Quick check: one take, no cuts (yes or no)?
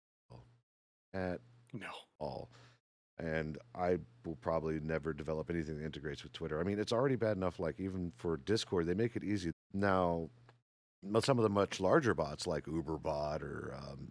no